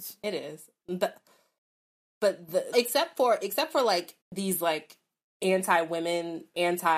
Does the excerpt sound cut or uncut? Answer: cut